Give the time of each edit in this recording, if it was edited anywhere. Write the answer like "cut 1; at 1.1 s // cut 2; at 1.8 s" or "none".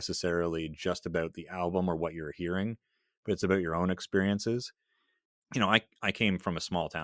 none